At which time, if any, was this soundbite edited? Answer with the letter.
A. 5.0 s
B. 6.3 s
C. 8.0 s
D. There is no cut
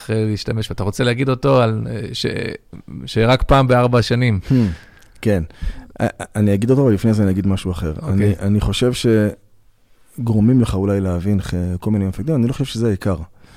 D